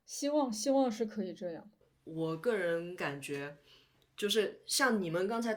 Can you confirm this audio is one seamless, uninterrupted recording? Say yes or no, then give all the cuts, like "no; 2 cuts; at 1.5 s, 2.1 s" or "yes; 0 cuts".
yes; 0 cuts